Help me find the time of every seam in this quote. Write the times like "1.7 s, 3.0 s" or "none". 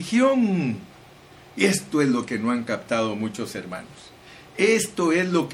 none